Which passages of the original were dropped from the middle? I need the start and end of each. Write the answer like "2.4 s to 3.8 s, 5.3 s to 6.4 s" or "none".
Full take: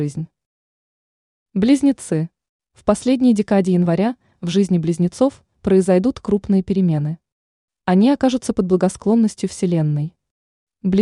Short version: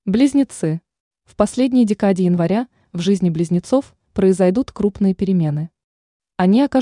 none